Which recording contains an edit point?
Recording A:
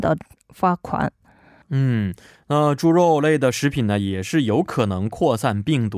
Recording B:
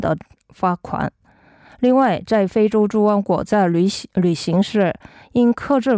A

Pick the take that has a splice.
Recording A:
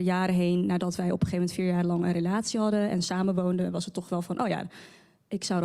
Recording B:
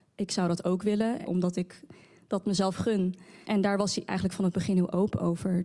B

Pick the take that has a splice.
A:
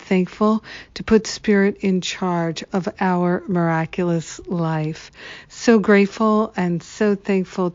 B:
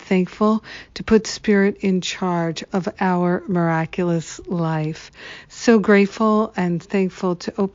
B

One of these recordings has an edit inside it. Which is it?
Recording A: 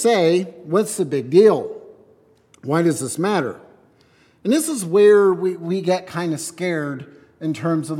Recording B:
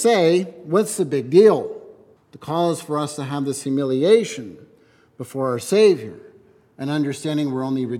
B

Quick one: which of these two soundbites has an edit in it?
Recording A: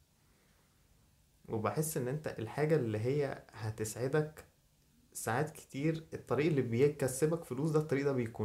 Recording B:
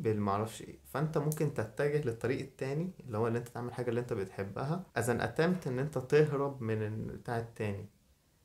B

